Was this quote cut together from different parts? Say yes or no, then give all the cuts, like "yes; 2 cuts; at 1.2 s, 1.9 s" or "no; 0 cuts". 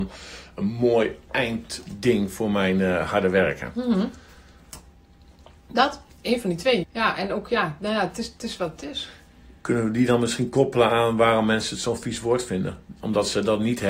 yes; 1 cut; at 6.8 s